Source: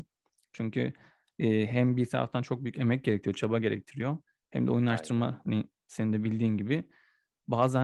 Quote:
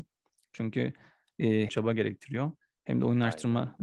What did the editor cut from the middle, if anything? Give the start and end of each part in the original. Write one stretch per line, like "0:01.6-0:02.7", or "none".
0:01.7-0:03.3